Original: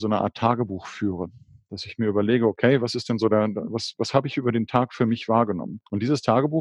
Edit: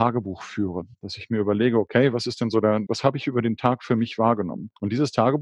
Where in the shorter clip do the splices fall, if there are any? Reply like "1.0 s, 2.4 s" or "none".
0.9 s, 2.9 s